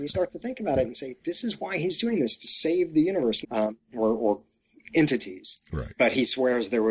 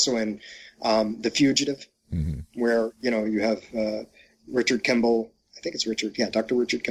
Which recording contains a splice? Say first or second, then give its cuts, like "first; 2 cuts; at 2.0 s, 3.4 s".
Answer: first; 2 cuts; at 3.4 s, 6.0 s